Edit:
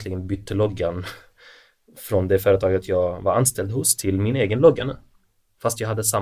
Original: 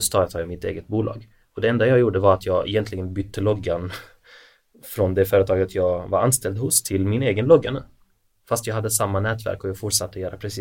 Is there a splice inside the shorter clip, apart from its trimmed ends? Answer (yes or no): no